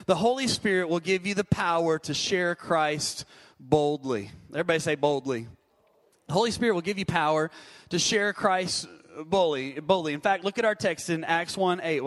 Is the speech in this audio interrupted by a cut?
no; 0 cuts

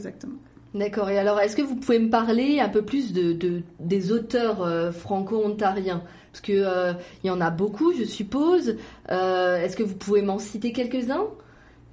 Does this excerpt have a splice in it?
no; 0 cuts

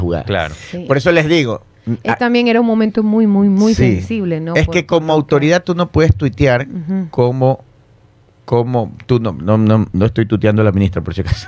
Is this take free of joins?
yes; 0 cuts

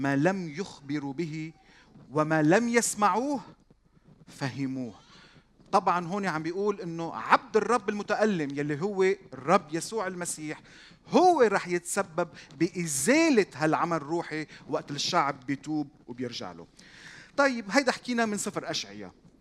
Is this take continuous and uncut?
yes; 0 cuts

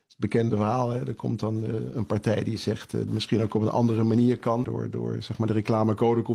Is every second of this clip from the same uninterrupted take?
no; 2 cuts; at 3.1 s, 4.6 s

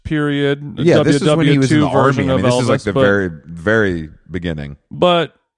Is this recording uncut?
yes; 0 cuts

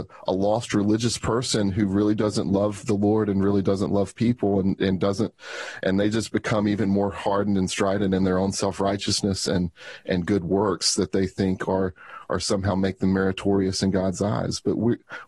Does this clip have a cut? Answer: no; 0 cuts

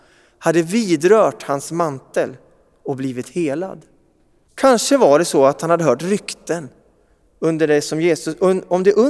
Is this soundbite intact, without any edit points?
no; 1 cut; at 4.5 s

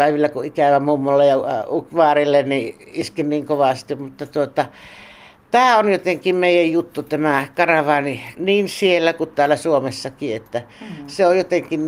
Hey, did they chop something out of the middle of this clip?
yes; 1 cut; at 8.3 s

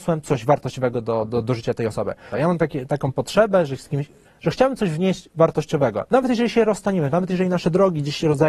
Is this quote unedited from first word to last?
no; 2 cuts; at 2.3 s, 4.2 s

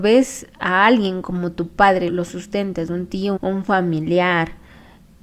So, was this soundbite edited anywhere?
yes; 2 cuts; at 2.1 s, 3.4 s

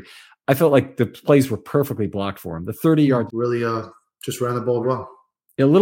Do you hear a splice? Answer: yes; 2 cuts; at 3.3 s, 4.8 s

